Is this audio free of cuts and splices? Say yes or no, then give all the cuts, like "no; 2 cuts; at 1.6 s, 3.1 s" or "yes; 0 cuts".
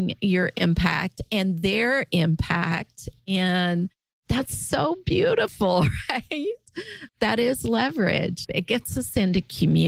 no; 2 cuts; at 7.1 s, 8.5 s